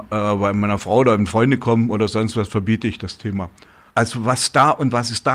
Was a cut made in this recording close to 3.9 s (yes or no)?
yes